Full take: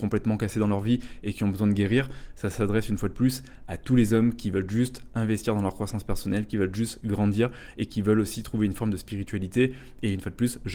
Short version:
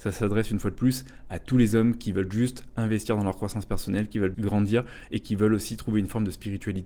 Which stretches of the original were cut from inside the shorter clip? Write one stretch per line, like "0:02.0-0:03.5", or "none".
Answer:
0:06.7-0:07.0